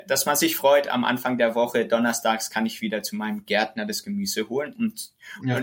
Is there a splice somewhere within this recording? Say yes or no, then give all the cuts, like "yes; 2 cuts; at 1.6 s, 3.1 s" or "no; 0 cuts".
no; 0 cuts